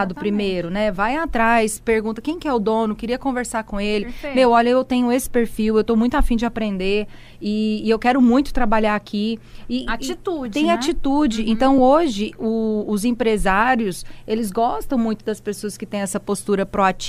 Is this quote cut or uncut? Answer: uncut